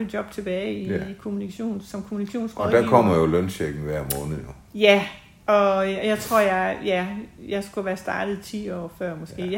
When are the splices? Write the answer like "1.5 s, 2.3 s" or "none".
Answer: none